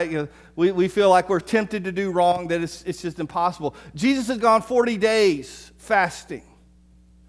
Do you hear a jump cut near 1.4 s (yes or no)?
yes